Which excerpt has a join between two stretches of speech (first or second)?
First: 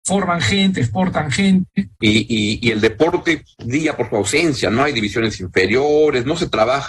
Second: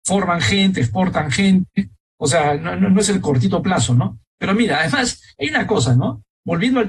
first